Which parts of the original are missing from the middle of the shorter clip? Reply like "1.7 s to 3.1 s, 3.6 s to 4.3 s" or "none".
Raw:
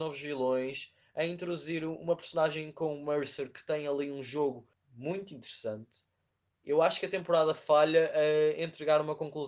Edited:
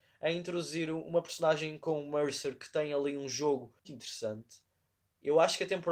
4.8 s to 5.3 s